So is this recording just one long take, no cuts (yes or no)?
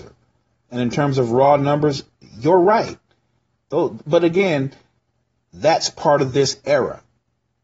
yes